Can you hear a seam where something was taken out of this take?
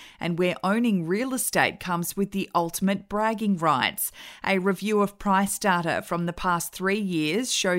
no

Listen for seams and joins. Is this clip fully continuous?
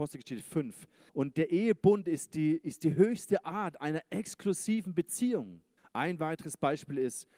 no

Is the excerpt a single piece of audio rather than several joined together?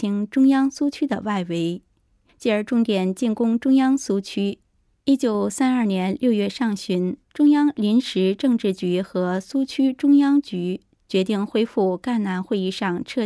no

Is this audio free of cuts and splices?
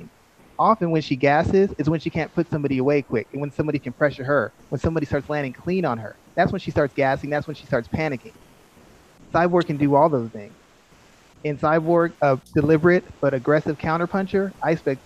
no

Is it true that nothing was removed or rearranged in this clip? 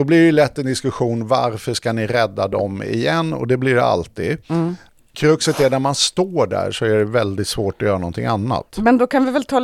yes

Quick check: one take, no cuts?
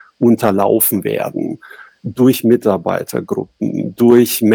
yes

